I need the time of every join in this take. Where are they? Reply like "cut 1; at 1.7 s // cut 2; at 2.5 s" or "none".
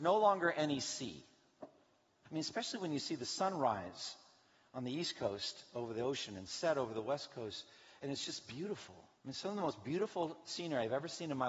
cut 1; at 2.2 s // cut 2; at 9.2 s